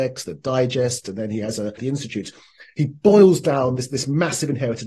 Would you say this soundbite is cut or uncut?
cut